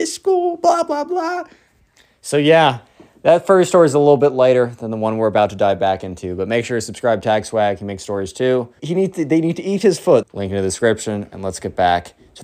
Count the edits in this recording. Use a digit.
2